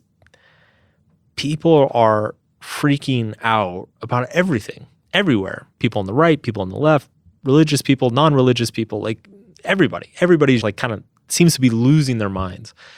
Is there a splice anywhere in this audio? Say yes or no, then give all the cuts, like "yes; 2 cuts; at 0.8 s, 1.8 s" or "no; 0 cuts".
yes; 2 cuts; at 3.9 s, 10.6 s